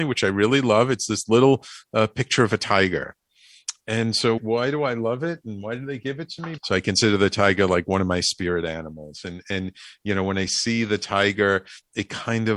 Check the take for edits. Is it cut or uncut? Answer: cut